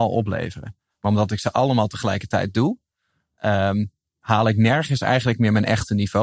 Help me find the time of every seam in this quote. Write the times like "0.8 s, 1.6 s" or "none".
none